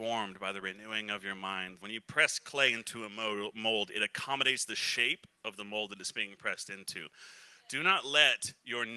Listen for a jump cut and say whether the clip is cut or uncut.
cut